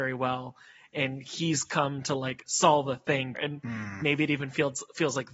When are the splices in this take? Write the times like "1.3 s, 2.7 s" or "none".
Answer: 3.3 s